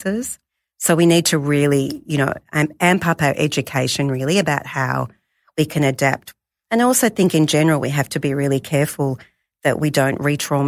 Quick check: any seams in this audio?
no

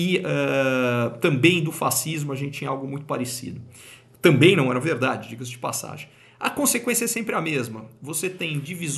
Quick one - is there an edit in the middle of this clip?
no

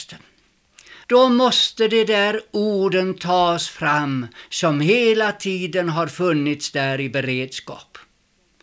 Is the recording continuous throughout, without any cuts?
no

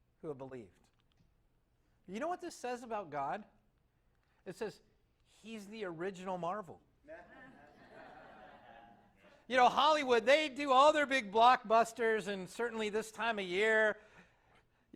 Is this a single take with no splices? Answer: yes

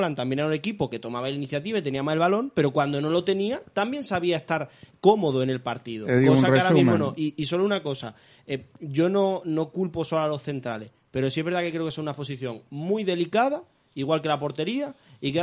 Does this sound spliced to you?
no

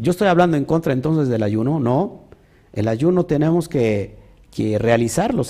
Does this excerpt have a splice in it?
no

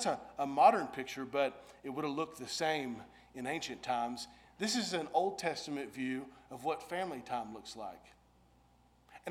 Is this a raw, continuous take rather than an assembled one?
yes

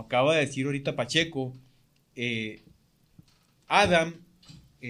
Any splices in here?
no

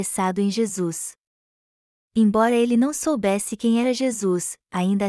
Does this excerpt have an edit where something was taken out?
no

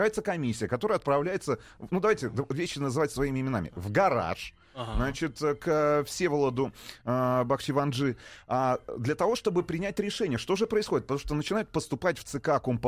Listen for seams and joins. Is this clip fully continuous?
yes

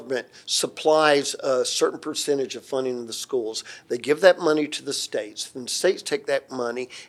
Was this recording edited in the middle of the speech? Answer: no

